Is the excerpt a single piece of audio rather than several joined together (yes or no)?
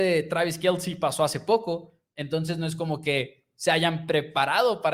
yes